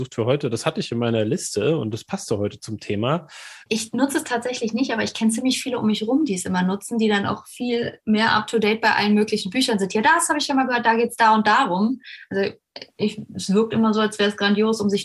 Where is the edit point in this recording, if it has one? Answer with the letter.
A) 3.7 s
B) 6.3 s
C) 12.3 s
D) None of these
A